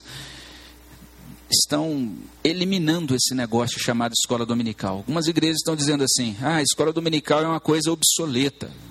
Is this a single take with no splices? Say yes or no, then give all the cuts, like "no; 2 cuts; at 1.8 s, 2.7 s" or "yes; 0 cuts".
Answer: no; 1 cut; at 2.4 s